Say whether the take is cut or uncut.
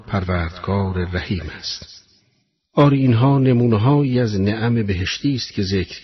uncut